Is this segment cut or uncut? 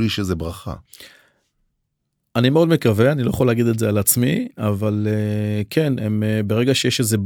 uncut